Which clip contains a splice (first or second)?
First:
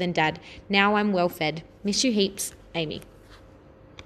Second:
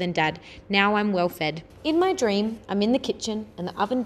second